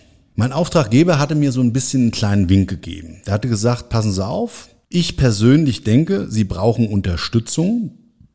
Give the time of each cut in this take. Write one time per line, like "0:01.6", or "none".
none